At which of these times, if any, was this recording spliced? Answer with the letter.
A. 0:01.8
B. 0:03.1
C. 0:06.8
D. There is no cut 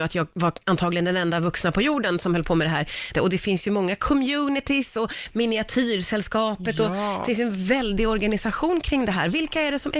B